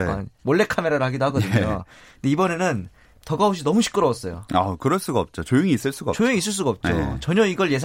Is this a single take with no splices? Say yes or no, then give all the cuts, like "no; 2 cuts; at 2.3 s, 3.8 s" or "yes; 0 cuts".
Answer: yes; 0 cuts